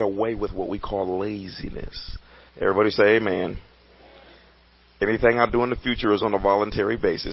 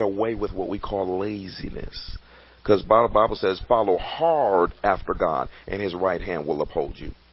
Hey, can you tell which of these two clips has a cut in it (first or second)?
first